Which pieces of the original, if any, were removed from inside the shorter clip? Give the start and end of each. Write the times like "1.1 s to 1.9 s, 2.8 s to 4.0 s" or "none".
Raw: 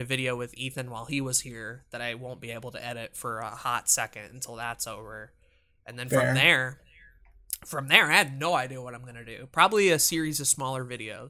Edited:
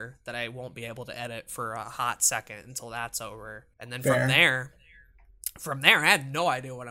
5.4 s to 5.8 s